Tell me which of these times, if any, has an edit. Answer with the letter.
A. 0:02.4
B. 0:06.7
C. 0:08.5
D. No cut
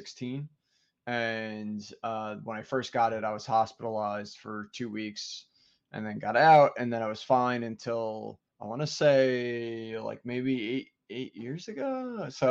C